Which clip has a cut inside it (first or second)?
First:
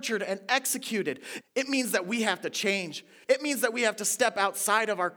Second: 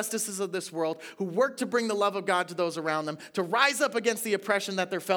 first